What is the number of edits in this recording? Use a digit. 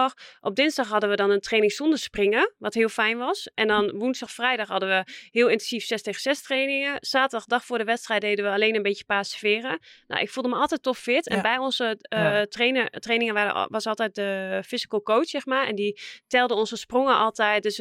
1